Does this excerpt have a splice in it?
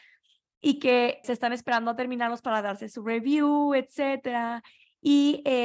yes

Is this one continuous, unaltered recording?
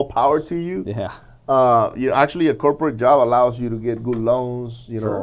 yes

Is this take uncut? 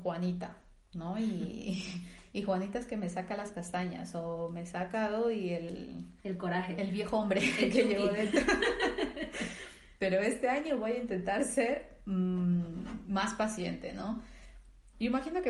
no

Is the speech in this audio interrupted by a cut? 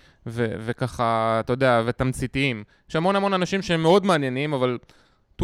no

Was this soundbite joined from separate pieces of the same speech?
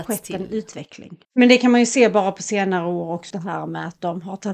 yes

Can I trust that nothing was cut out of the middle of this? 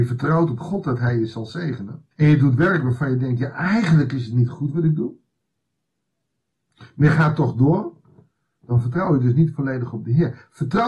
no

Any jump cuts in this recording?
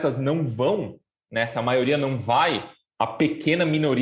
yes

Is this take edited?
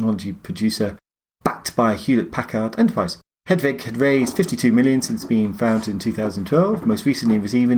no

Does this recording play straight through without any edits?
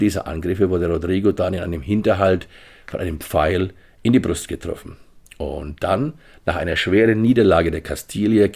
no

